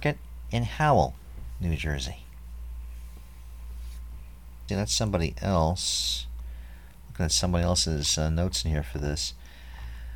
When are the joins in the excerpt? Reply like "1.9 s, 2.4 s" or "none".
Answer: 4.7 s